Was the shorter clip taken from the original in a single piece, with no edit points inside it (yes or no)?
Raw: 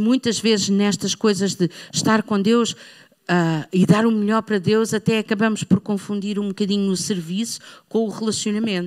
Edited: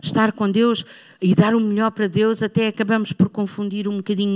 no